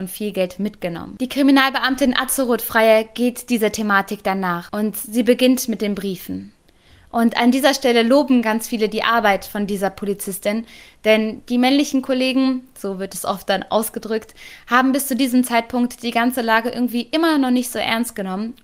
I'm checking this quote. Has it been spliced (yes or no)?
no